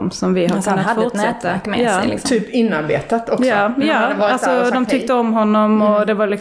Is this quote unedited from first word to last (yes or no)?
yes